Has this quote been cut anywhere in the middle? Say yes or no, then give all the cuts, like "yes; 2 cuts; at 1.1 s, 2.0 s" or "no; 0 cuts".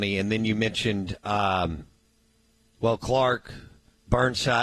no; 0 cuts